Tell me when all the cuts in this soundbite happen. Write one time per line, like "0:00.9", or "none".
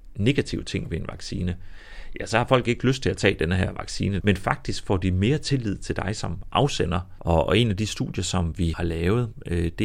0:04.2
0:07.2
0:08.7